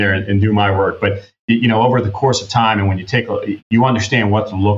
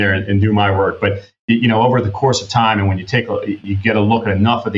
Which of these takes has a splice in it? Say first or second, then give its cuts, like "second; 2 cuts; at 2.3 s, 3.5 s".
first; 1 cut; at 3.6 s